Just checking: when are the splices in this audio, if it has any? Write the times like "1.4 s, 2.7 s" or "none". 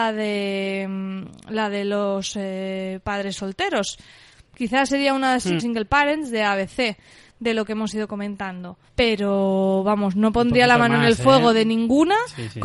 5.6 s, 8.9 s